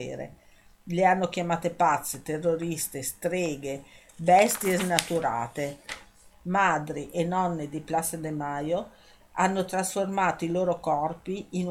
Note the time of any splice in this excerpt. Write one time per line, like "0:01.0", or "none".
0:06.3